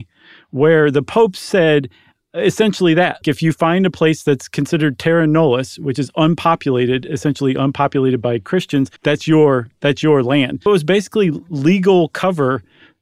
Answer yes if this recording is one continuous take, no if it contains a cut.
no